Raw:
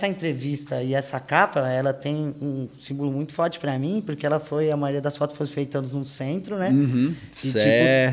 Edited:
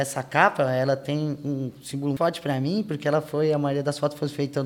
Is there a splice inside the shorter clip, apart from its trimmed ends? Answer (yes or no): yes